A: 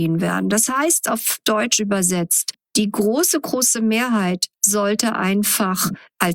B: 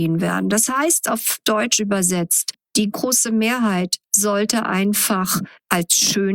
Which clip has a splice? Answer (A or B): B